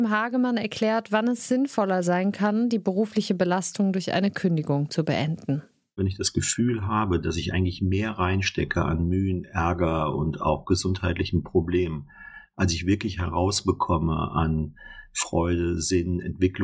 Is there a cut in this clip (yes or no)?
no